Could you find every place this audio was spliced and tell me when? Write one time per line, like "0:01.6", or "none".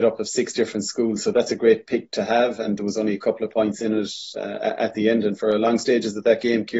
none